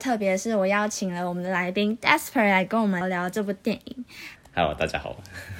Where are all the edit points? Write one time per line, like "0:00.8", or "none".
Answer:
0:03.0
0:04.4